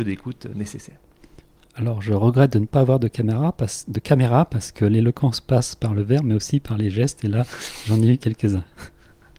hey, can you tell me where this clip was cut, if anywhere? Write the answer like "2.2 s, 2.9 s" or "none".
none